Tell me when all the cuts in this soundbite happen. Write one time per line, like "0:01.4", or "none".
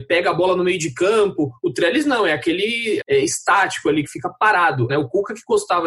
0:03.0
0:04.9